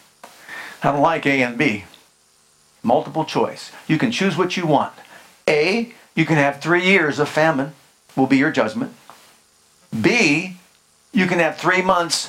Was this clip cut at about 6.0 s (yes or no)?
no